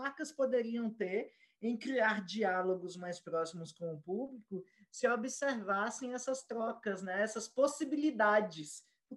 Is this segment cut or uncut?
uncut